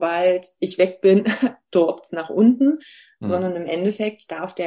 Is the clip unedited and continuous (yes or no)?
yes